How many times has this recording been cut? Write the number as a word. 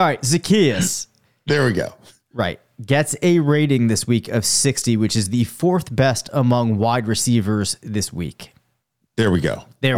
zero